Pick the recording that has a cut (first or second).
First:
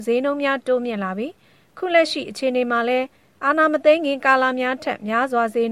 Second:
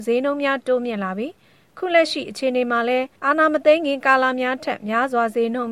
second